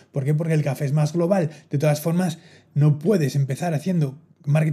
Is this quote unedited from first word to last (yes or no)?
yes